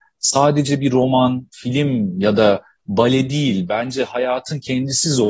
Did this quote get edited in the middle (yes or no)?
no